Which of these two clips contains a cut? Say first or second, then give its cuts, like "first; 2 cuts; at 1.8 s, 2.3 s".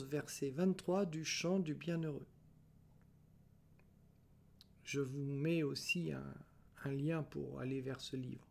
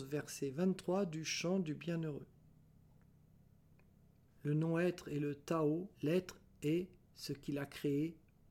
second; 2 cuts; at 4.3 s, 5.9 s